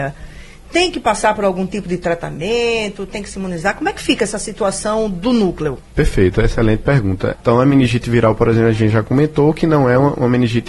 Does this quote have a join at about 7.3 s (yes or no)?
yes